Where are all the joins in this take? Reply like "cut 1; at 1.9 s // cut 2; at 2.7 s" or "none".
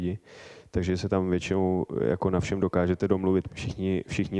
cut 1; at 3.5 s